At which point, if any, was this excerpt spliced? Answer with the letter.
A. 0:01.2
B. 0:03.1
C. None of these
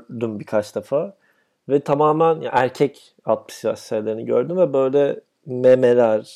C